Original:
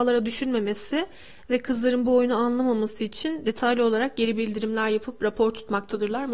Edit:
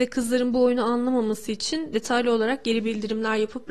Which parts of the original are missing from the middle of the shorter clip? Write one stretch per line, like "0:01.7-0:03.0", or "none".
none

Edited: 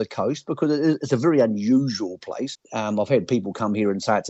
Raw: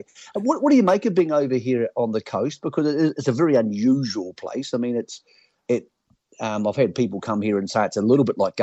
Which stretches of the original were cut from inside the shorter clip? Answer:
0:04.7-0:06.2

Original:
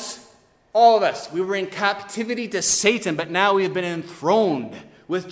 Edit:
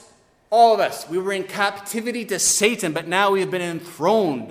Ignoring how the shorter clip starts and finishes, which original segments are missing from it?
none

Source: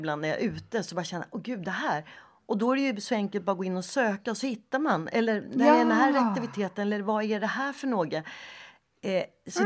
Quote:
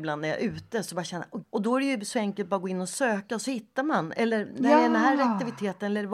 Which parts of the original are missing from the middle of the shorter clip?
0:01.4-0:02.4

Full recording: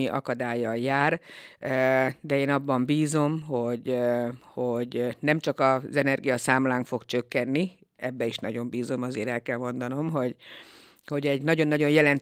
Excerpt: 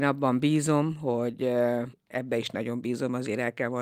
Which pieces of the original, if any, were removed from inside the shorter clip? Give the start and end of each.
0:04.4-0:07.8

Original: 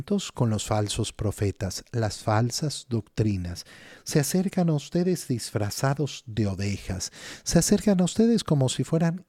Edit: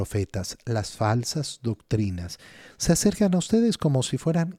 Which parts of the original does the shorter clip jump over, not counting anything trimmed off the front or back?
0:04.0-0:07.4

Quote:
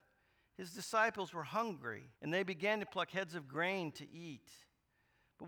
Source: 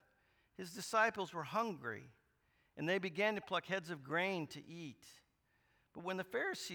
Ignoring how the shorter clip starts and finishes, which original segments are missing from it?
0:02.1-0:02.7

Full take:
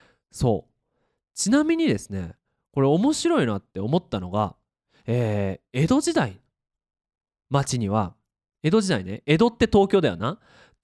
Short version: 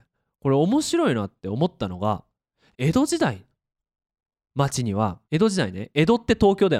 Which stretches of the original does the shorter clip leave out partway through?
0:05.0-0:05.7
0:08.2-0:08.6

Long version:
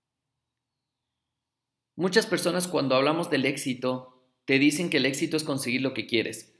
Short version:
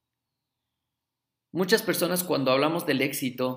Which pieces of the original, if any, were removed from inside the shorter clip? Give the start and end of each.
none

